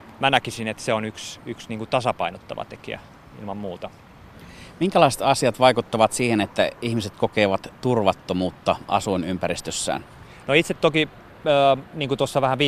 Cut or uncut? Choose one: uncut